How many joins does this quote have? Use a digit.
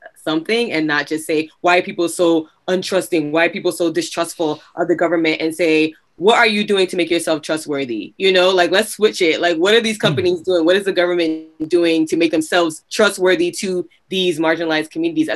0